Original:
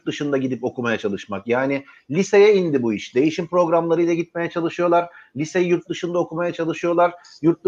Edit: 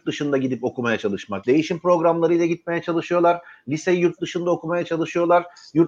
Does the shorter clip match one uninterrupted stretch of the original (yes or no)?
no